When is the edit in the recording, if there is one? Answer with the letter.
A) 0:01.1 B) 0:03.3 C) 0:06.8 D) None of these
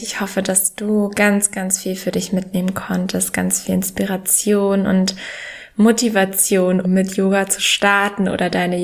C